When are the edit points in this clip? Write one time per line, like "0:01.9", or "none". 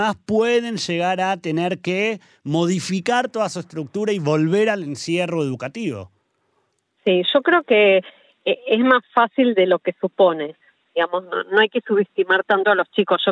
none